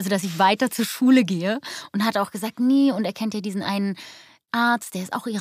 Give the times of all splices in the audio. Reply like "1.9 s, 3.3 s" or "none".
none